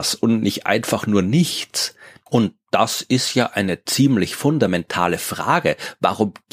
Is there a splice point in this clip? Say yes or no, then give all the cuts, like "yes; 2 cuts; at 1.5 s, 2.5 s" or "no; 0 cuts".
yes; 1 cut; at 2.3 s